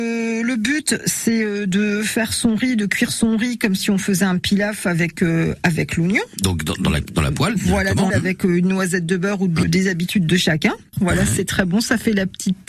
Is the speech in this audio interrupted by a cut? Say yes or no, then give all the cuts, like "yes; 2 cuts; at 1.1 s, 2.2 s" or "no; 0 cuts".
yes; 3 cuts; at 8.1 s, 9.6 s, 10.9 s